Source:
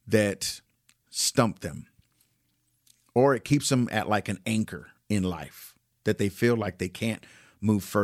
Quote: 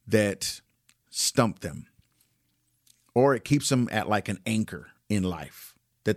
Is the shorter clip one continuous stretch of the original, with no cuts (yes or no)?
yes